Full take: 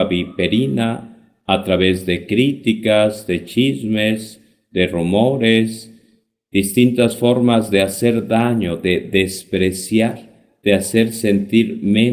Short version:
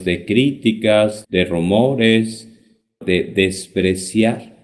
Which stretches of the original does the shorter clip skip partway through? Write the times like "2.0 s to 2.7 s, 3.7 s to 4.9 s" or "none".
3.3 s to 4.7 s, 6.4 s to 8.8 s